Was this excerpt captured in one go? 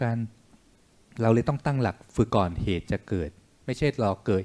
no; 1 cut; at 2.3 s

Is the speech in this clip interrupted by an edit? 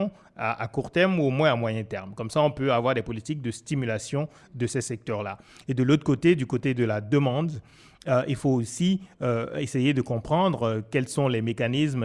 no; 0 cuts

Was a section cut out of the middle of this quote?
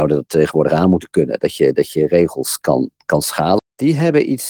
yes; 1 cut; at 3.6 s

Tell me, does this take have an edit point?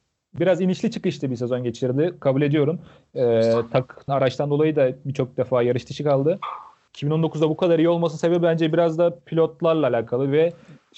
yes; 2 cuts; at 4.1 s, 6.9 s

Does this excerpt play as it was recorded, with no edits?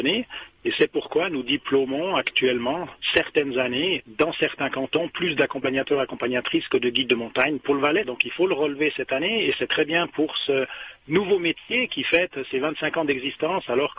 no; 1 cut; at 8.0 s

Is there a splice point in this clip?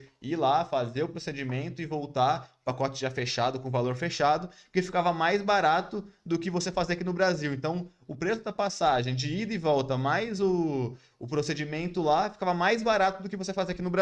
no; 0 cuts

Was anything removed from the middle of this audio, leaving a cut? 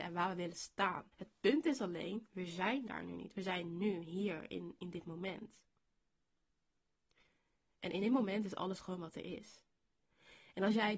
yes; 1 cut; at 1.1 s

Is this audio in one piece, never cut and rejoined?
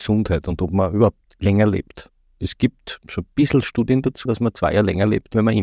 no; 1 cut; at 4.3 s

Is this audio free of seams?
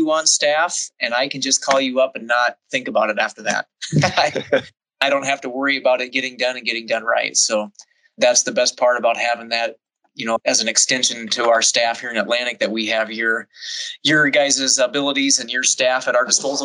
yes; 0 cuts

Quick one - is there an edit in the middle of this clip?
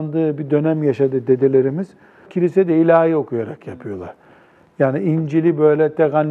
yes; 1 cut; at 2.2 s

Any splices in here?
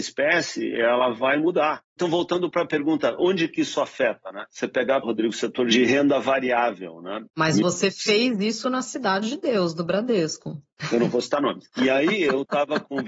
yes; 2 cuts; at 5.0 s, 7.3 s

